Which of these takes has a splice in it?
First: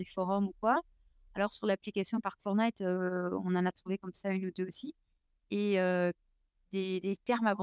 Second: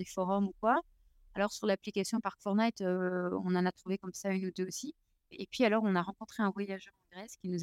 second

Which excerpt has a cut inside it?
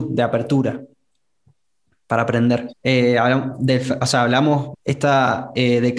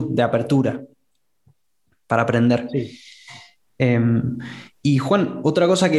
first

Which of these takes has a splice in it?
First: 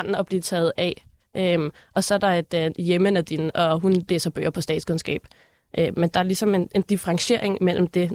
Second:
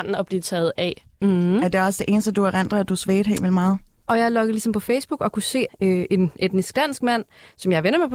second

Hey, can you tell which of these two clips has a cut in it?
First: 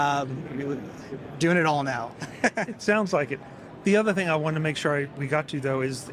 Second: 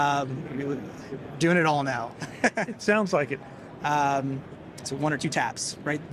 second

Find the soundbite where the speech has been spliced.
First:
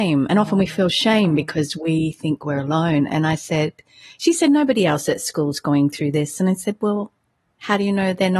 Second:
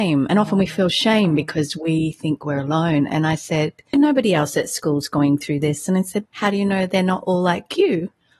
second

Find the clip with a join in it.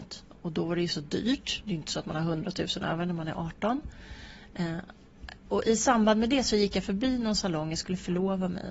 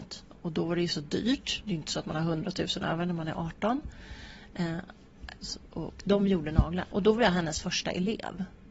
second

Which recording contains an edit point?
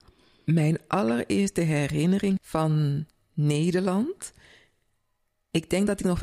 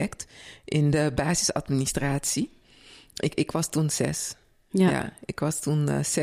first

